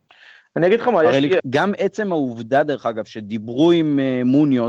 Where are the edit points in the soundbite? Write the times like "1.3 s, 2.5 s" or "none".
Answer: 1.4 s